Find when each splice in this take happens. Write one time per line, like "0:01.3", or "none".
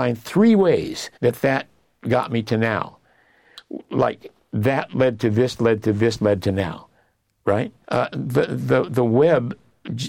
0:01.2
0:07.8

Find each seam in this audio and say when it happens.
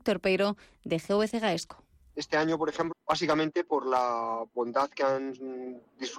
0:02.9

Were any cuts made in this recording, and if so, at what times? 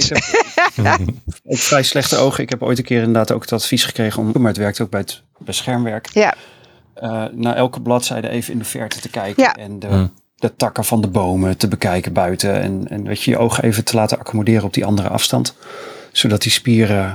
0:04.3

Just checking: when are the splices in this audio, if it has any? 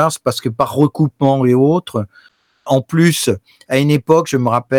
0:02.7

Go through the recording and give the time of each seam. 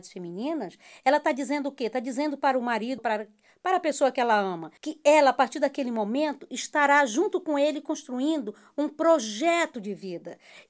0:03.0
0:04.8

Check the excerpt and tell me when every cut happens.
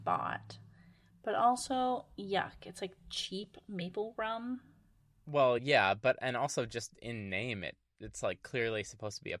none

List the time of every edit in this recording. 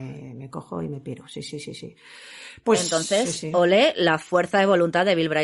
none

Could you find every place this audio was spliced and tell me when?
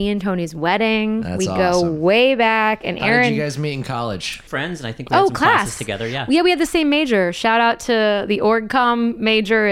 none

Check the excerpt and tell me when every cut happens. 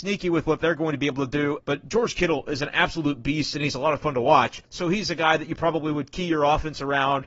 0:01.6
0:04.6

